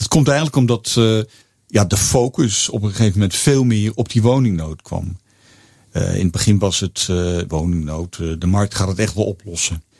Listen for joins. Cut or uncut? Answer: cut